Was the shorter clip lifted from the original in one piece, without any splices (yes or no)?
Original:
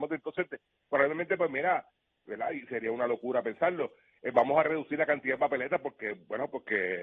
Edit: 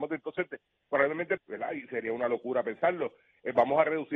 no